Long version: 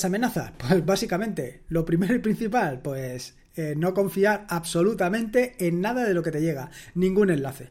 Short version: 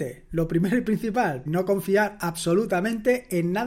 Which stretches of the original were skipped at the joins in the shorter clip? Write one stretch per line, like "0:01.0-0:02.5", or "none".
0:02.8-0:03.7